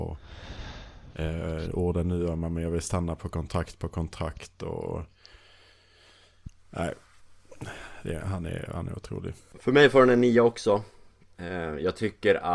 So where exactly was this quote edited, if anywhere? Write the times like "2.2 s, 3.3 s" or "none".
none